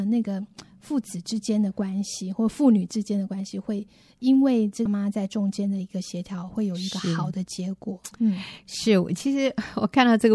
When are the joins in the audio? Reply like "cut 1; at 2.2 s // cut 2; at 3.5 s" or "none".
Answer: cut 1; at 4.9 s